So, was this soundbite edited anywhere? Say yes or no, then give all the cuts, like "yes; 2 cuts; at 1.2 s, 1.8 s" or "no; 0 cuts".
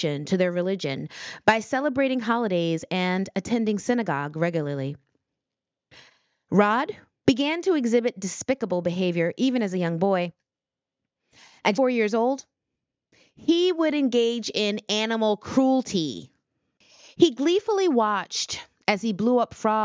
yes; 1 cut; at 11.7 s